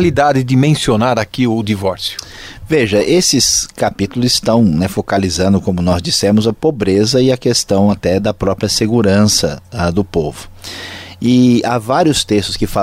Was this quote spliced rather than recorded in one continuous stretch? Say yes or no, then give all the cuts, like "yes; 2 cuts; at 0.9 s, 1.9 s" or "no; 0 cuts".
yes; 1 cut; at 8.2 s